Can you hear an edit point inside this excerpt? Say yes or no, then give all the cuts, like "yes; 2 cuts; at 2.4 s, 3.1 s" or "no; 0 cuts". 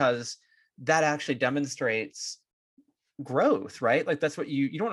no; 0 cuts